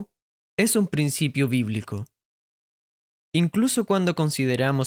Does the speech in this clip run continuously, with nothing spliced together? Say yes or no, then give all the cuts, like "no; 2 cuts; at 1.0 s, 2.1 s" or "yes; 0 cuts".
yes; 0 cuts